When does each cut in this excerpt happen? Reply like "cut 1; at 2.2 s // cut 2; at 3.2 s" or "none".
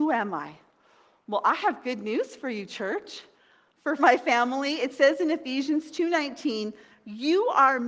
cut 1; at 4.0 s